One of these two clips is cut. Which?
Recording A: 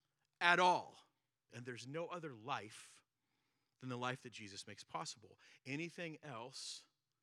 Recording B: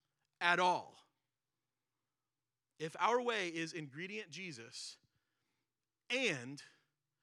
A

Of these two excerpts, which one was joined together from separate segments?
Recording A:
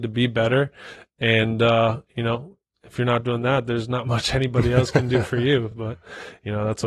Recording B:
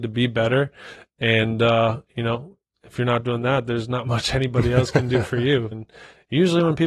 B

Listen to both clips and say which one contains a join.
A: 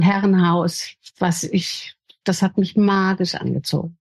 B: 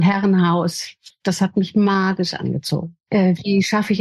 B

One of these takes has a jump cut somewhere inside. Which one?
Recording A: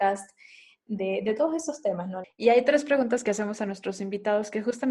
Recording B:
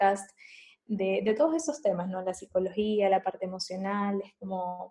A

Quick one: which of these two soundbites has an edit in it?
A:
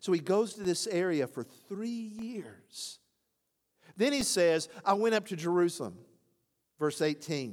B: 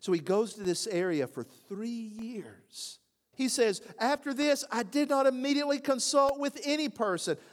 B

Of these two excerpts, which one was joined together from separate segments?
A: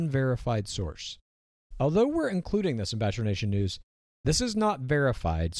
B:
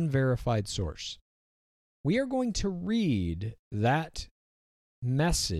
A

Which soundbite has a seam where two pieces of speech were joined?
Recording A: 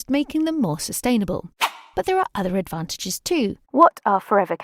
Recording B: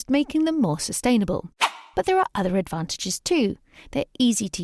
A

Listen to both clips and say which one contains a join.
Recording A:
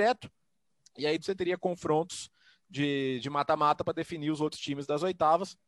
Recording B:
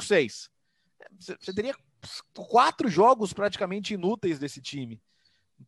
A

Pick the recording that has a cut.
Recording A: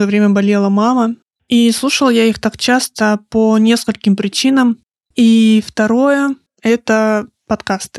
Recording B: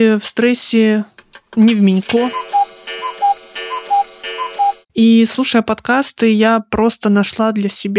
A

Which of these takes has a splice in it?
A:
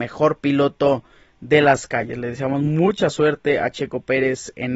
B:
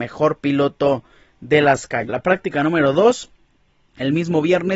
B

